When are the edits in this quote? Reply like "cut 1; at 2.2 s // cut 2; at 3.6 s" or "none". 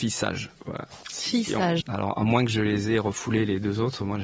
cut 1; at 1.8 s